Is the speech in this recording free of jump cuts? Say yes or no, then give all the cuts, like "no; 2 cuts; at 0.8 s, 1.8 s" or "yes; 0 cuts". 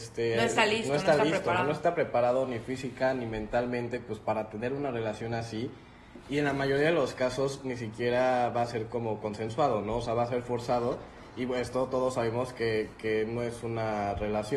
yes; 0 cuts